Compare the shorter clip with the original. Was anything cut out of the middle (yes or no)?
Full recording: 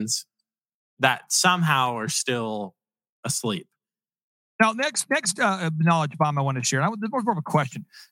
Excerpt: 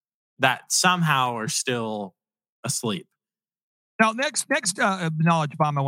no